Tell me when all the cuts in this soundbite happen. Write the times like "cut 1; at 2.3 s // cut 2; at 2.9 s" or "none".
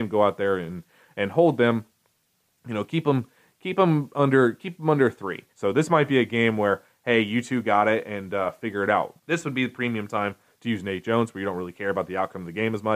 cut 1; at 5.5 s // cut 2; at 9.2 s